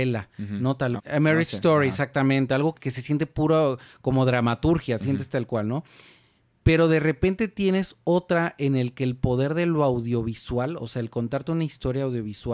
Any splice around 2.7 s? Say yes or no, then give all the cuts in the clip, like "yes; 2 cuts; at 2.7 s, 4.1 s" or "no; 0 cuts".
yes; 2 cuts; at 1.0 s, 2.7 s